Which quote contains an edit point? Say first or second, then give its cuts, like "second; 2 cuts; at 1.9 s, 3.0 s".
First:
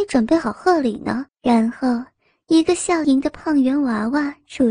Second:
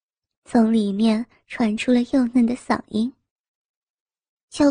first; 2 cuts; at 1.3 s, 3.0 s